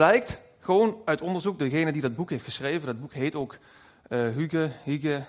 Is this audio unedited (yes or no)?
yes